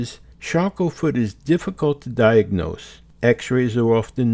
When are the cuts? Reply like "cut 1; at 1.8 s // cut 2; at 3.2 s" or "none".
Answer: none